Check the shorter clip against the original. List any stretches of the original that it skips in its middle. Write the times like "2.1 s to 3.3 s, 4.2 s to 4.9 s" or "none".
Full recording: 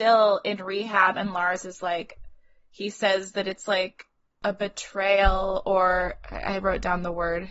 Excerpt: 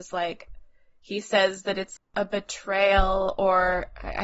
3.7 s to 4.2 s